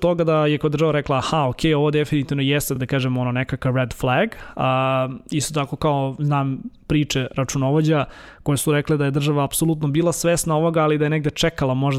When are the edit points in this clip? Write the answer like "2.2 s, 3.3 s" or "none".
none